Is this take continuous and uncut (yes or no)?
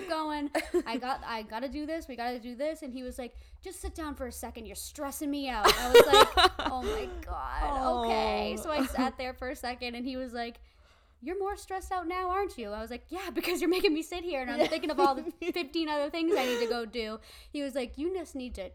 yes